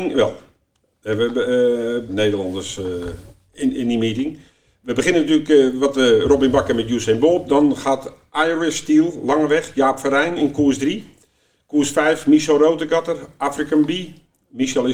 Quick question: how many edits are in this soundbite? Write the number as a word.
one